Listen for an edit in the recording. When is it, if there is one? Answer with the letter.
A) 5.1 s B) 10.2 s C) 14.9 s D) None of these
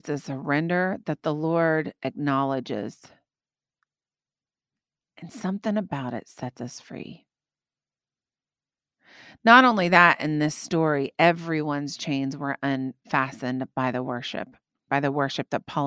C